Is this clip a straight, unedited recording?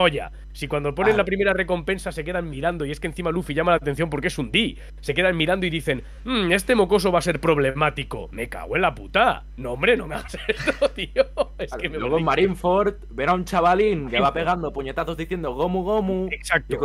yes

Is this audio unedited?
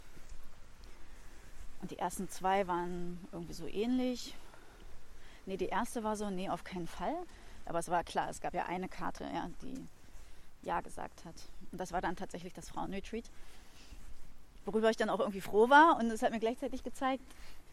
no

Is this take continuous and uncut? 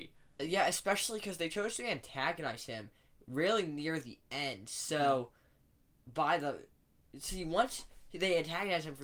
yes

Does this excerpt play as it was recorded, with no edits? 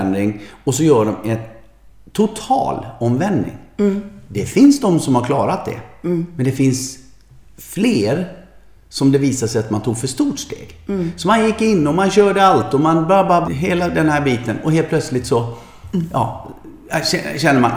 no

